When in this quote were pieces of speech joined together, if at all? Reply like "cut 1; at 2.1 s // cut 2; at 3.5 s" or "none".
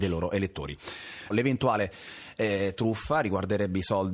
cut 1; at 1.3 s